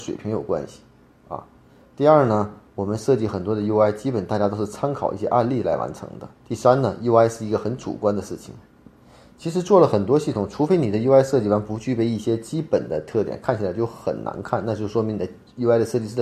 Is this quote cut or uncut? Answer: cut